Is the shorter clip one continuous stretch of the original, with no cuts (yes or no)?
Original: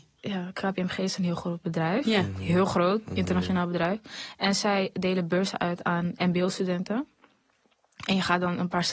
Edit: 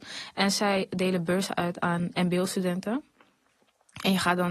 yes